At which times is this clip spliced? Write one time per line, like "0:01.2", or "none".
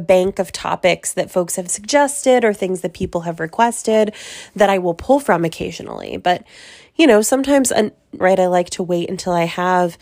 0:08.2